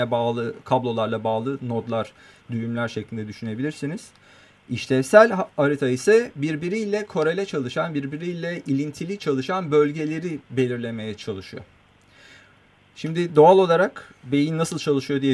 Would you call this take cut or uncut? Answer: uncut